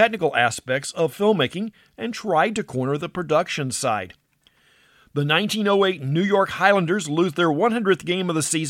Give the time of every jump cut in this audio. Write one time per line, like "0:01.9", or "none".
none